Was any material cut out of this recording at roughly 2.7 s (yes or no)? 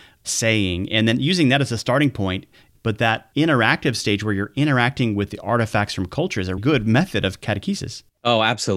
yes